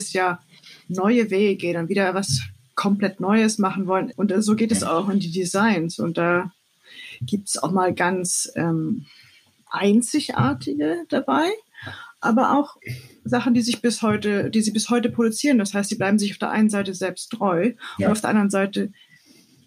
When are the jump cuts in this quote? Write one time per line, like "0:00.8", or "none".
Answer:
0:04.1

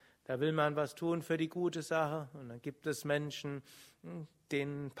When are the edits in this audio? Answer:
none

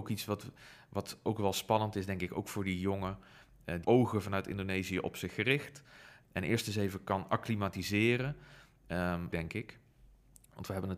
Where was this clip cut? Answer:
0:03.8
0:06.2
0:09.3

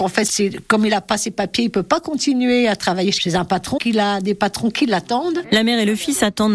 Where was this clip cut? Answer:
0:03.8

